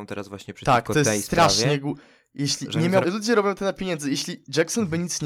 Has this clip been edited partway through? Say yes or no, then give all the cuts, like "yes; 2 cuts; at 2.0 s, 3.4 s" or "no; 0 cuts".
yes; 1 cut; at 3.0 s